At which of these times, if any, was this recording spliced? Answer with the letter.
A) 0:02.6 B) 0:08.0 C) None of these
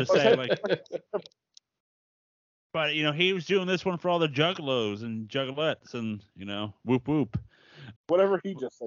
B